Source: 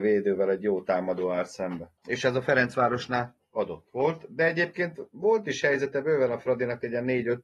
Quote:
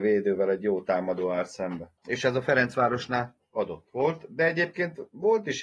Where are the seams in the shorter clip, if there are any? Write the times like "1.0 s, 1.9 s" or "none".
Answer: none